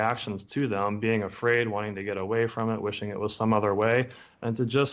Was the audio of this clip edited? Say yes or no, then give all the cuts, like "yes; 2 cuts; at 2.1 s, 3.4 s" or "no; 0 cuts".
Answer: no; 0 cuts